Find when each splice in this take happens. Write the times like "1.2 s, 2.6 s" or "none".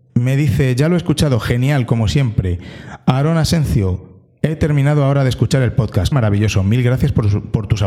6.1 s